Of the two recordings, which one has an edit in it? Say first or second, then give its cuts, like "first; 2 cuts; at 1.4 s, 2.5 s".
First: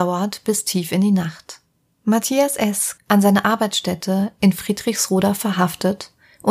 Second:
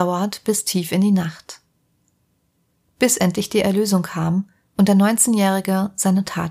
first; 2 cuts; at 1.9 s, 3.0 s